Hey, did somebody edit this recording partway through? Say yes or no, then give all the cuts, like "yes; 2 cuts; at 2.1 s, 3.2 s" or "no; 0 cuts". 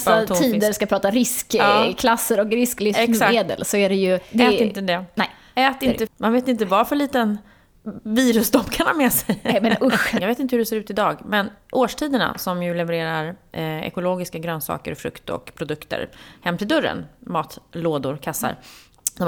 yes; 2 cuts; at 6.1 s, 10.2 s